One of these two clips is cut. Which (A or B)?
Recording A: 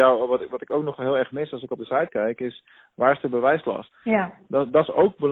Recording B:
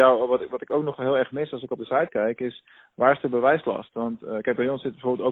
A